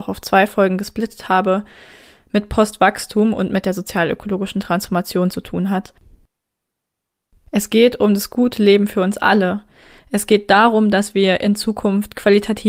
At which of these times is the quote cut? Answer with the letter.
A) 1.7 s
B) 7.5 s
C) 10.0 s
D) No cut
D